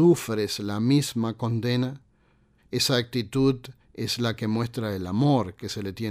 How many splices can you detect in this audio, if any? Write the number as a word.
one